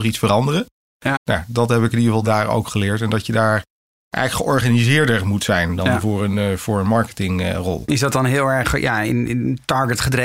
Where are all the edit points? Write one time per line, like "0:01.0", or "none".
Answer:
0:01.2